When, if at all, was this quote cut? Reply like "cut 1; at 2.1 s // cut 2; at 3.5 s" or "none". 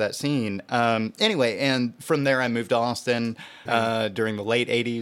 cut 1; at 3.7 s